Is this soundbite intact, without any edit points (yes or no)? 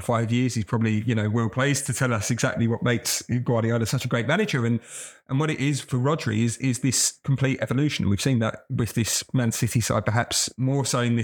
yes